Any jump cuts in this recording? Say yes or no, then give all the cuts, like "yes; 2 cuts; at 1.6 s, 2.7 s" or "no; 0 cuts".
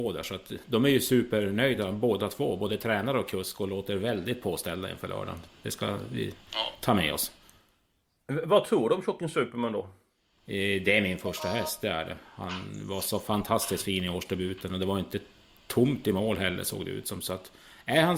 no; 0 cuts